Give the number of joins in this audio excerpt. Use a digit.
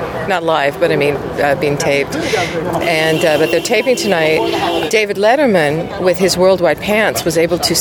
0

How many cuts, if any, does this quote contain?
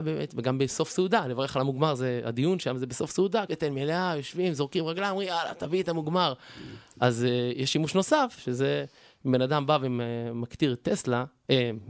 1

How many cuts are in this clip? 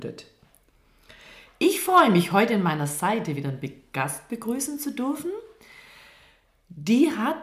0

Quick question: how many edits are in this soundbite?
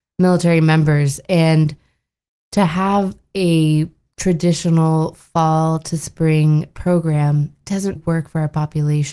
1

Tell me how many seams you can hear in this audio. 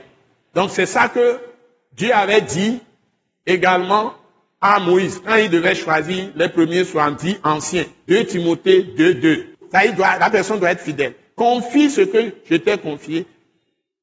2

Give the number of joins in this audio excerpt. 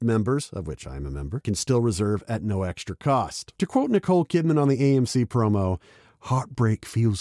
1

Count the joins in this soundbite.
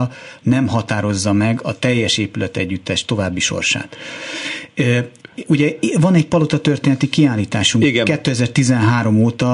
0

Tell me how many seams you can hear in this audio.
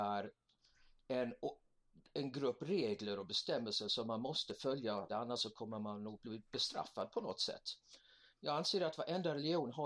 1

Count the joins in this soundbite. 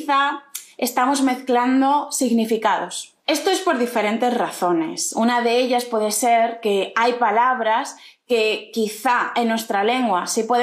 1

